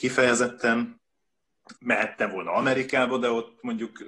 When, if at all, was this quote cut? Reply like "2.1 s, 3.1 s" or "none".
1.8 s